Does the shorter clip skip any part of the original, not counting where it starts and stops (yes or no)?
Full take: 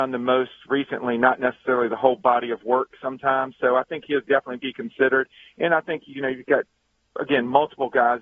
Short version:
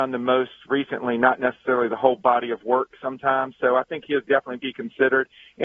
no